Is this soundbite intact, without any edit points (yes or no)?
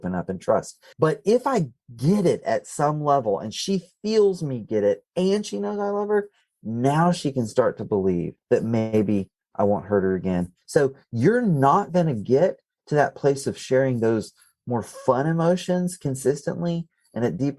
no